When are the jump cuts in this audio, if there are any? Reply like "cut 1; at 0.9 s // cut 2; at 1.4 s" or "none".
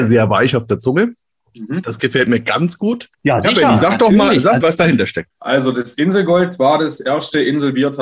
cut 1; at 3.1 s // cut 2; at 4.6 s